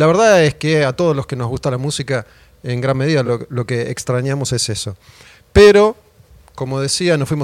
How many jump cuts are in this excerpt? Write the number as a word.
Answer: zero